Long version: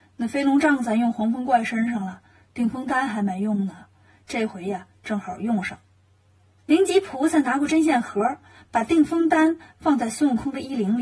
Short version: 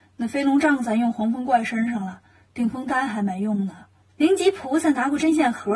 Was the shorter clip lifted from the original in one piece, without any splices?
no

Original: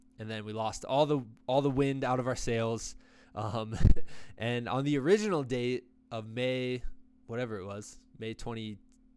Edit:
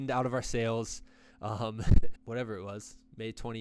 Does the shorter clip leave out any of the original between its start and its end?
yes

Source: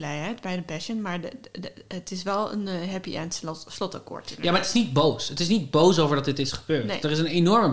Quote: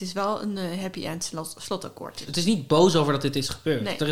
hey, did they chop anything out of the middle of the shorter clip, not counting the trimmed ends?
yes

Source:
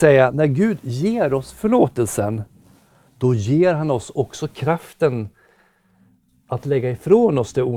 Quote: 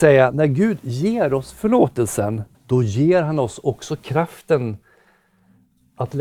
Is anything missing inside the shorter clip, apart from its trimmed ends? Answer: yes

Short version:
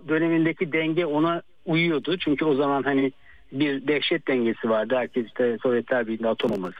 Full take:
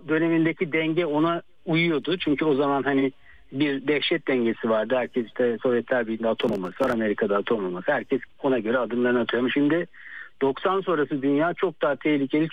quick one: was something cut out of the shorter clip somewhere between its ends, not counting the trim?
no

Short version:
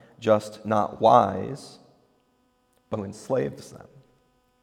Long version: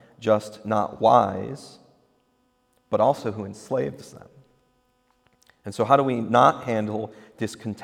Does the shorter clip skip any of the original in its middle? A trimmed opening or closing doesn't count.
yes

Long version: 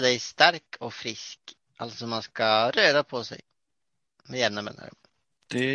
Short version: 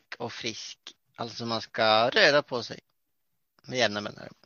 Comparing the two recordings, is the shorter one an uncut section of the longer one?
yes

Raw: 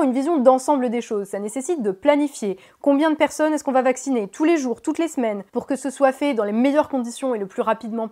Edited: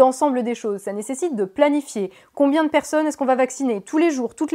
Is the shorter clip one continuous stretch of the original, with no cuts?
yes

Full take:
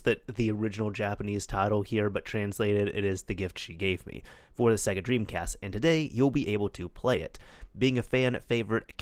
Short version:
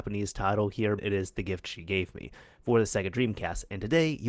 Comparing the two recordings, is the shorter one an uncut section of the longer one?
no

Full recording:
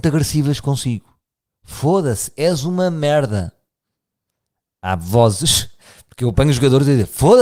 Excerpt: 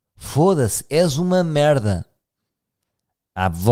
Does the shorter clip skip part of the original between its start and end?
no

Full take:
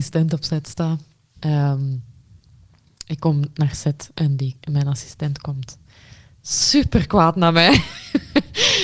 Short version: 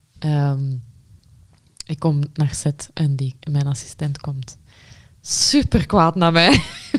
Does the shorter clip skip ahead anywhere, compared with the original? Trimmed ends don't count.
no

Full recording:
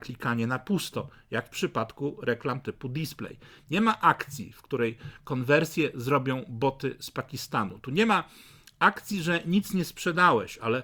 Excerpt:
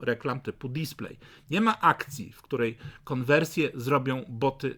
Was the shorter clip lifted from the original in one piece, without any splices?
yes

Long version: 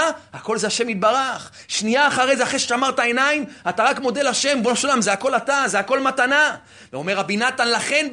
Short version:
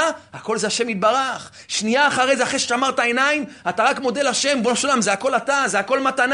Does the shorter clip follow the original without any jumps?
yes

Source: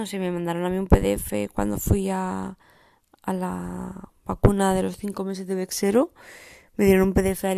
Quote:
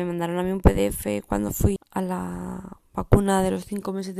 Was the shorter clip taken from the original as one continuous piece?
no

